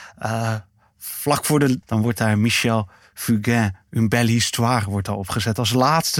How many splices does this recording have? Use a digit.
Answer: 1